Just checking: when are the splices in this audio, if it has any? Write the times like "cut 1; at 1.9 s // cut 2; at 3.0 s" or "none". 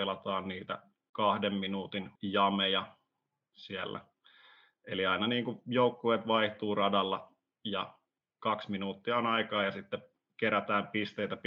cut 1; at 2.2 s